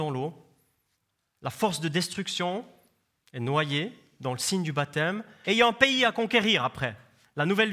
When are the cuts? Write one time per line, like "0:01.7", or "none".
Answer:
0:05.4